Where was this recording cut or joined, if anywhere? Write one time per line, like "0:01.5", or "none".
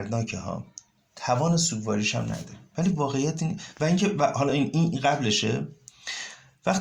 none